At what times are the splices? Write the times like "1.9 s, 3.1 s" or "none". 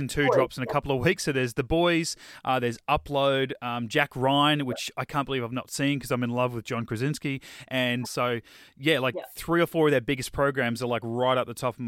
8.0 s